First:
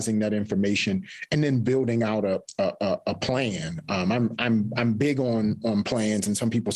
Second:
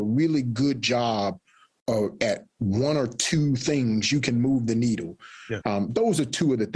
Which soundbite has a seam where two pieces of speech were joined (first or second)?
second